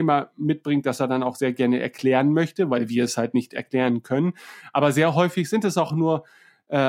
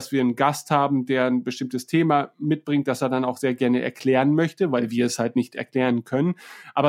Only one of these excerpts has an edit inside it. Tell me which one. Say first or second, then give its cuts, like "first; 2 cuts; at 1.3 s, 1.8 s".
first; 1 cut; at 5.9 s